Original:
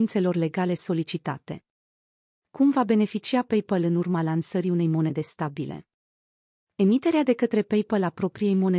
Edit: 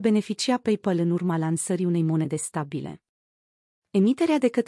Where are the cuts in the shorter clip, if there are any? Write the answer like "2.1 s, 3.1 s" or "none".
none